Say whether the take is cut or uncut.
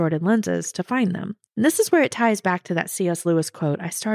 uncut